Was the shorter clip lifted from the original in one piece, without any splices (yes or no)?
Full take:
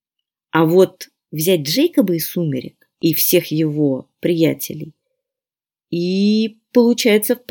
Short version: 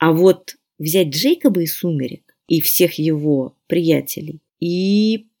no